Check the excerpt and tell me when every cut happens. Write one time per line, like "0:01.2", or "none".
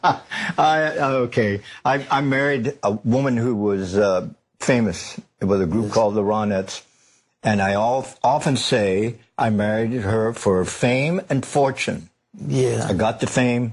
none